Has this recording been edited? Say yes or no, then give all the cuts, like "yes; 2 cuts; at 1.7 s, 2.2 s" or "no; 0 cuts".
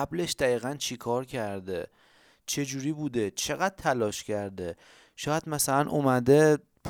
no; 0 cuts